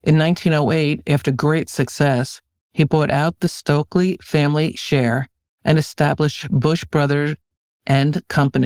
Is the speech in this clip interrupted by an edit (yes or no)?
no